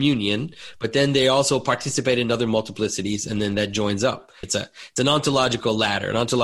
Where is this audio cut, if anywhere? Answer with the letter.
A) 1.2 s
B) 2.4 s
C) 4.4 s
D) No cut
C